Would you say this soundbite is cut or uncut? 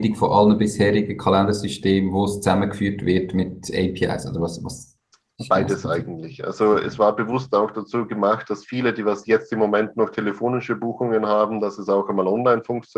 uncut